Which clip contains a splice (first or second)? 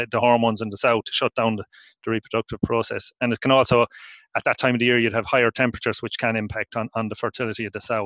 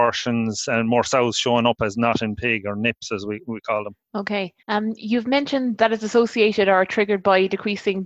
second